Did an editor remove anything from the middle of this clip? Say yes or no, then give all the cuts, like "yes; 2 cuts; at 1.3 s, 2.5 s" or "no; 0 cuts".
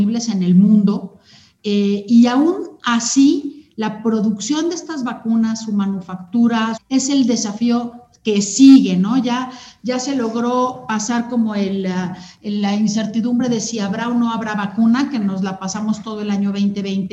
yes; 1 cut; at 6.8 s